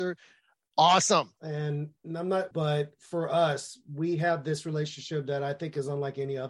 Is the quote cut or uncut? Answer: cut